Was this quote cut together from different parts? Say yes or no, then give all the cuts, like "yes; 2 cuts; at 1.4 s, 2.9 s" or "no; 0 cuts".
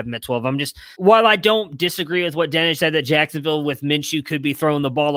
yes; 2 cuts; at 0.9 s, 2.8 s